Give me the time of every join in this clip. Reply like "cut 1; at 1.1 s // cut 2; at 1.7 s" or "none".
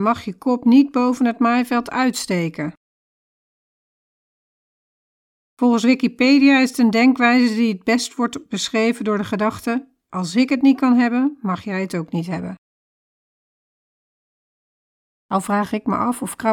none